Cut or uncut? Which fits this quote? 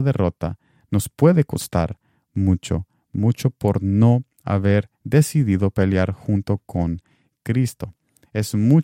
uncut